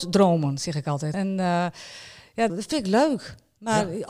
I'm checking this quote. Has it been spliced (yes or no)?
yes